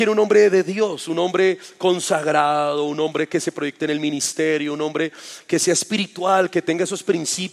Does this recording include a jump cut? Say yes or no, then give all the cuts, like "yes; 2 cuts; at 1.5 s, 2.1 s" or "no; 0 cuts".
no; 0 cuts